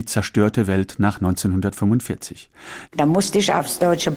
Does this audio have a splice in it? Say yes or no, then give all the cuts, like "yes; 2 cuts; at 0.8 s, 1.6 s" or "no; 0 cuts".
yes; 1 cut; at 2.9 s